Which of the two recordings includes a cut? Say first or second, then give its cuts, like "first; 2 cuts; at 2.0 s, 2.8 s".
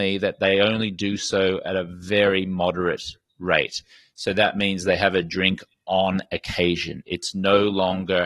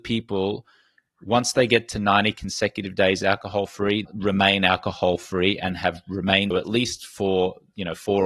second; 2 cuts; at 4.1 s, 6.5 s